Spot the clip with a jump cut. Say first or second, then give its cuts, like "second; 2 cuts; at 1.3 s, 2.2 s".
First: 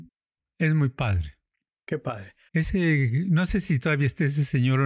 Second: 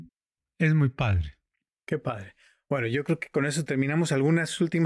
first; 1 cut; at 2.5 s